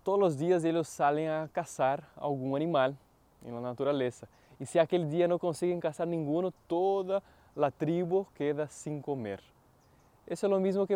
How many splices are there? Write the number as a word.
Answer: zero